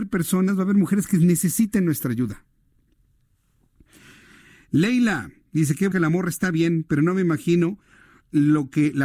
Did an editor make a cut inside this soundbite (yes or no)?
yes